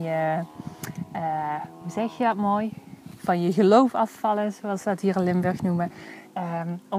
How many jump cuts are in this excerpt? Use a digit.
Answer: 0